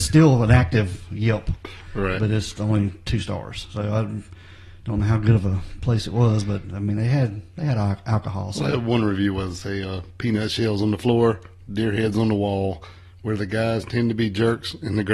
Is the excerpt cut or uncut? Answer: uncut